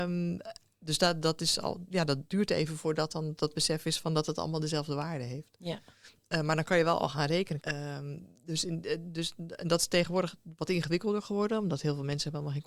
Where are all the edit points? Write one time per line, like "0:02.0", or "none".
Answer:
0:07.6

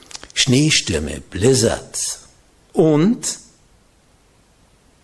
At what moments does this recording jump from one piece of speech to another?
0:02.7

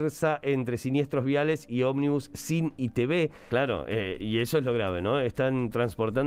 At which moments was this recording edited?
0:03.5

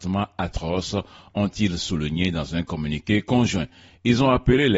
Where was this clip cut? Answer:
none

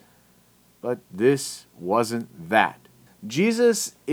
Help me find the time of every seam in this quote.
0:03.1

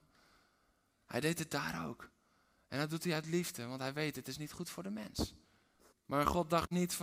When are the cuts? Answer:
0:05.9

